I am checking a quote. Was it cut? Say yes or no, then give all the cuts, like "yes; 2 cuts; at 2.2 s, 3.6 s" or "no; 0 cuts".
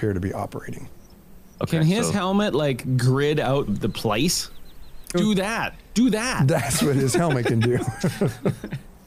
yes; 2 cuts; at 3.7 s, 5.1 s